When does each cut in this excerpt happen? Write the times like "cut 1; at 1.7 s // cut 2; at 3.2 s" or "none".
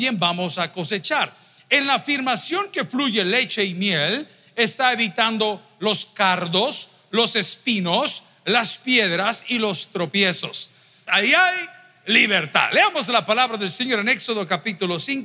cut 1; at 11.1 s